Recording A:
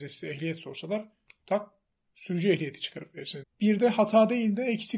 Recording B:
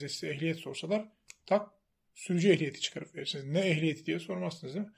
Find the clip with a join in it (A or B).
A